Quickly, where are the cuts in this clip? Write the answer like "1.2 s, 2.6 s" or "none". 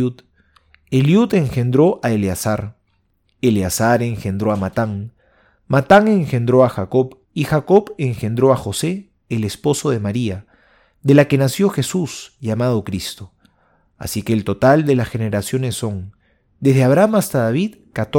7.2 s